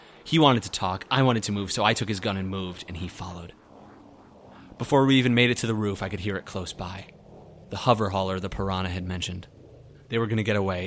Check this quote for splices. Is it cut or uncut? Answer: uncut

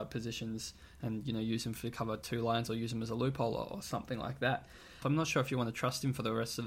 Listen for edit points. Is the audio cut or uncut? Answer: cut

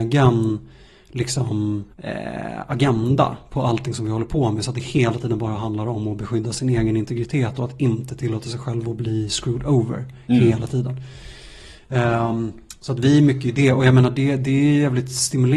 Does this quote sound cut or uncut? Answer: cut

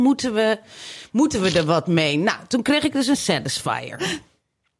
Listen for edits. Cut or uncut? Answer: uncut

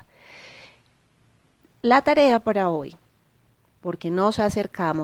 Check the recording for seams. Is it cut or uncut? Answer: uncut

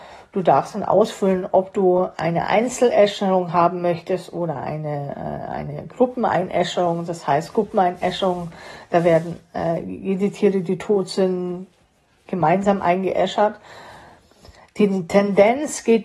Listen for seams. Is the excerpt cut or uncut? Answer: uncut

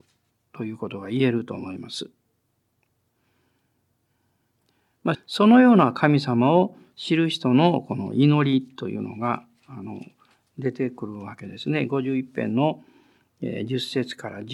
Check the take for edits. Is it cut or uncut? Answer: cut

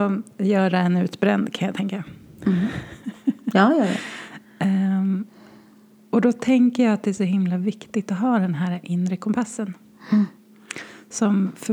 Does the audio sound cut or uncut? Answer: uncut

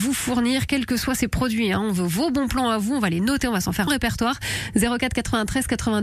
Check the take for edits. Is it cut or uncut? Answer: cut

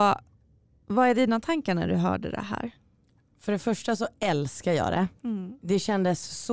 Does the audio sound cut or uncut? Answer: uncut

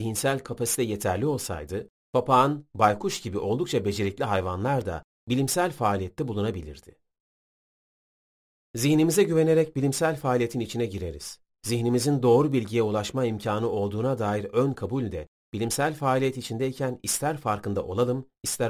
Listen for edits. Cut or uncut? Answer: cut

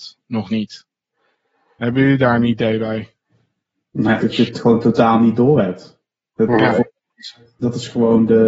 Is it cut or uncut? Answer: cut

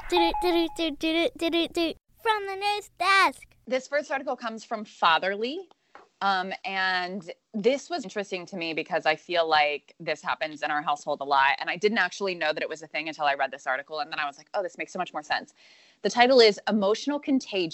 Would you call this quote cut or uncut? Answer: cut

